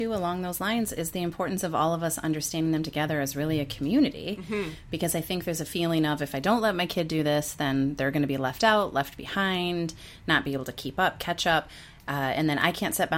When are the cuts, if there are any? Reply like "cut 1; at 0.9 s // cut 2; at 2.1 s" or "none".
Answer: none